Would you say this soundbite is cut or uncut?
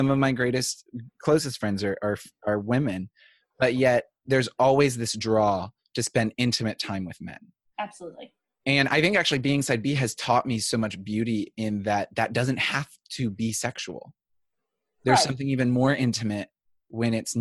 uncut